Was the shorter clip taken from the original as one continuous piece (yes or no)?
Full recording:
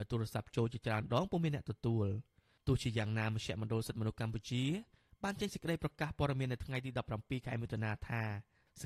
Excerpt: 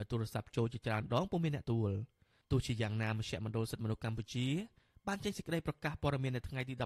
no